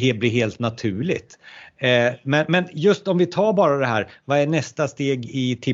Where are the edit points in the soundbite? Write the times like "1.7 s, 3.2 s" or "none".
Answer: none